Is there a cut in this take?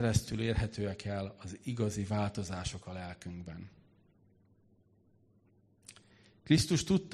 no; 0 cuts

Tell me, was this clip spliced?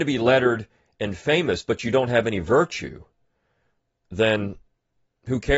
no; 0 cuts

